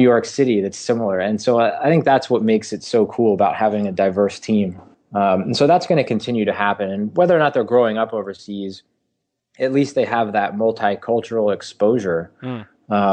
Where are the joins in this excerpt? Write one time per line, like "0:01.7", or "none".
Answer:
0:04.9

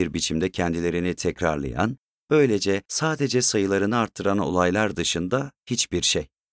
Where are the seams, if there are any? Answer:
none

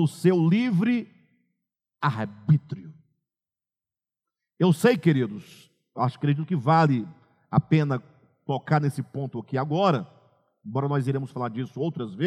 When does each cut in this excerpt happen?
none

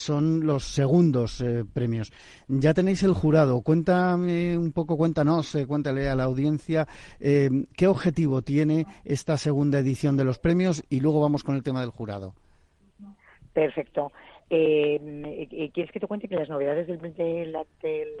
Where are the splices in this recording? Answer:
none

